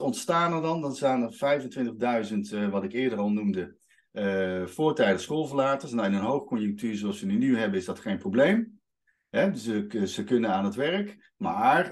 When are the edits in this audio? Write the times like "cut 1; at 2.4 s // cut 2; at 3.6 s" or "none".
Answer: none